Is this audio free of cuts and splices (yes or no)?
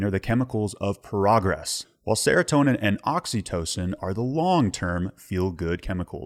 no